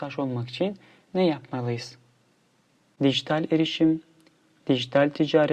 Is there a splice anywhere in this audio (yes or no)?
yes